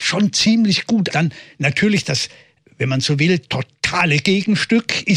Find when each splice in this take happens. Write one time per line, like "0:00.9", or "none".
0:01.1